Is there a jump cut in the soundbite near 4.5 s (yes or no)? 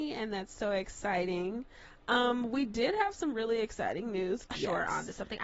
yes